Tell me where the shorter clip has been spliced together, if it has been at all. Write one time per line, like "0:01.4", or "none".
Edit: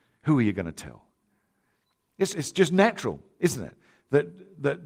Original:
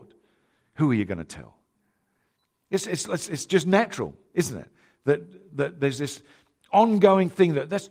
0:02.3